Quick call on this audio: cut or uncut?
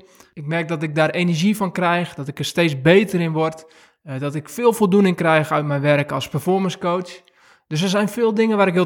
uncut